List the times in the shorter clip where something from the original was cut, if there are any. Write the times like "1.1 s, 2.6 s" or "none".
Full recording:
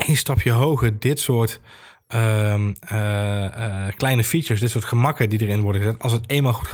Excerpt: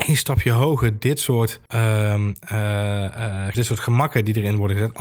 1.7 s, 3.5 s